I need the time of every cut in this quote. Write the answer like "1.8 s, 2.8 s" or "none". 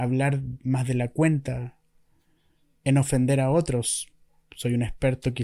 none